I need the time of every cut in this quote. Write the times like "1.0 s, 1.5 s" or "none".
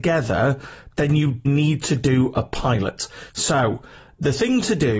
1.4 s, 3.3 s